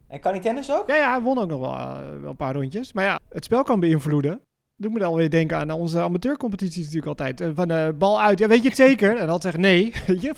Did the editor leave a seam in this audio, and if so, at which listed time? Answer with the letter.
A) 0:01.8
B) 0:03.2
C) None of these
B